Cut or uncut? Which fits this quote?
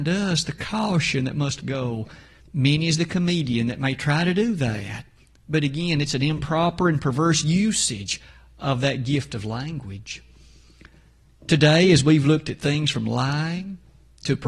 cut